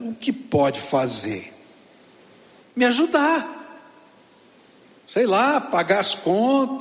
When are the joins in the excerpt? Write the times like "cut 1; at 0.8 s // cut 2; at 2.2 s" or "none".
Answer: none